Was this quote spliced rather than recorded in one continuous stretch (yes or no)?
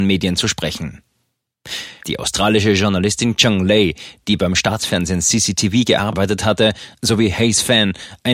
yes